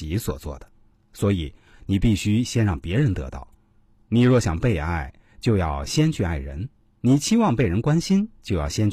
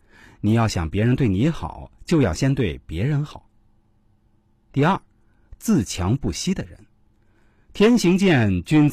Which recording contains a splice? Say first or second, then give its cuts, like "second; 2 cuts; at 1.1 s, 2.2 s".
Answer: first; 1 cut; at 1.7 s